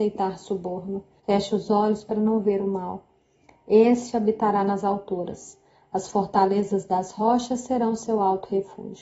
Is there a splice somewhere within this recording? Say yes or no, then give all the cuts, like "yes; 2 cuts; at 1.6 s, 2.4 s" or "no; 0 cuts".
yes; 1 cut; at 1.2 s